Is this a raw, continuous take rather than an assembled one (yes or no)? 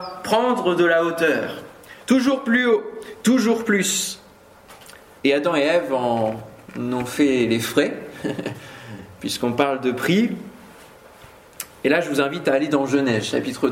no